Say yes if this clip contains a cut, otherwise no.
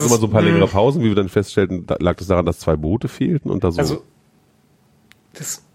no